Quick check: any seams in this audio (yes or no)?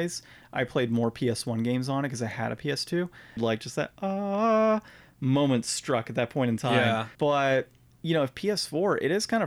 yes